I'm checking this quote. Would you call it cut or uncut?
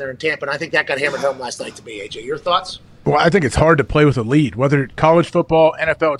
uncut